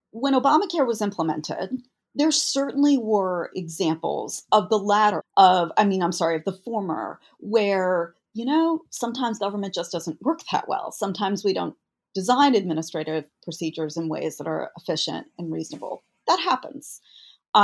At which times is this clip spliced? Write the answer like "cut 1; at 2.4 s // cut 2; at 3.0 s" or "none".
cut 1; at 5.2 s